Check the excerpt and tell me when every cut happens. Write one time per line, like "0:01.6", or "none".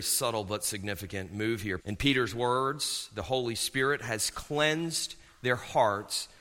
0:01.8

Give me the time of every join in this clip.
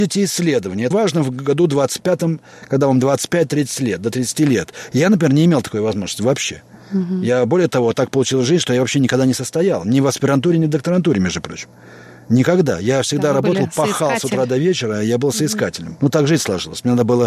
0:00.9
0:16.0

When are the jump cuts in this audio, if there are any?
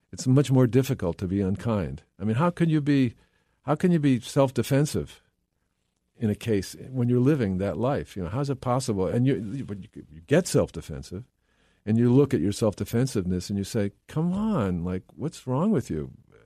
none

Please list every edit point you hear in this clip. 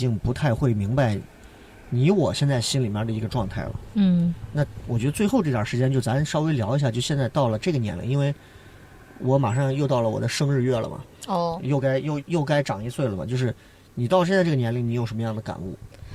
0:12.2

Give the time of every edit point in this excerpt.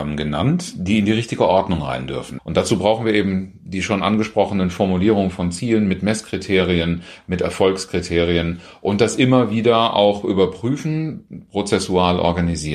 0:02.4

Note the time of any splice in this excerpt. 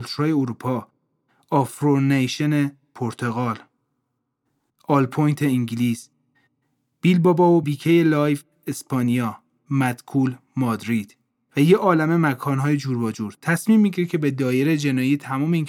0:07.6
0:11.5

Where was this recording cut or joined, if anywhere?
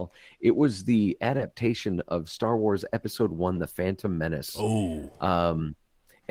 none

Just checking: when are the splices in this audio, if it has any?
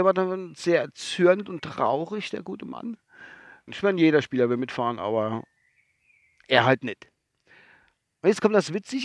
0:03.7

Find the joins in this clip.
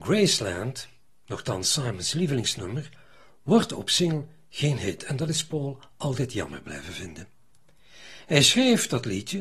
none

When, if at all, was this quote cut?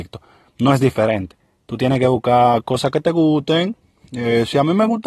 none

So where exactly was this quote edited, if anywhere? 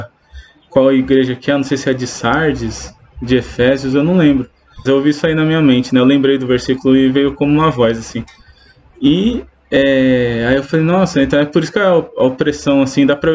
0:04.9

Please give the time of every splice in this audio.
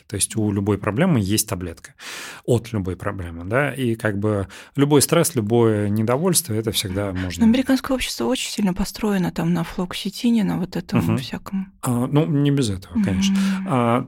none

